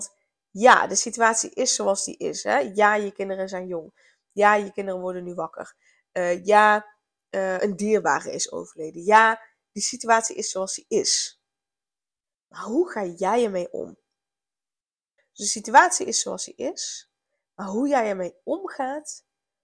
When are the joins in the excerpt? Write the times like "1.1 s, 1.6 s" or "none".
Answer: 7.6 s, 15.2 s